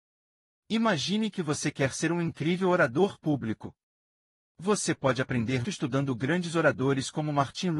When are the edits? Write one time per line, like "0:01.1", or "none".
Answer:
0:05.6